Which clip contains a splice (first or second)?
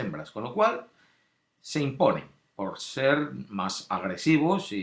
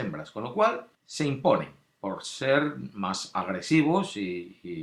second